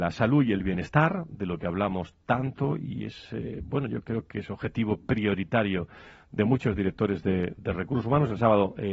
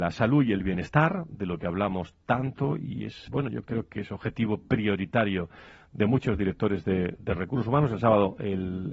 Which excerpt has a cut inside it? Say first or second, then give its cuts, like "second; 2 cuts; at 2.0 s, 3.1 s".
second; 1 cut; at 3.3 s